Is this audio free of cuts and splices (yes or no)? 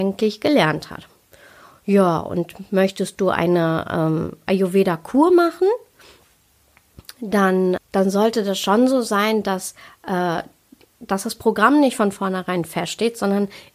no